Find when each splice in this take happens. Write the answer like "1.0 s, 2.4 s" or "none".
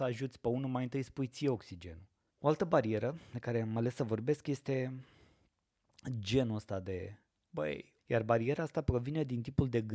2.3 s, 8.0 s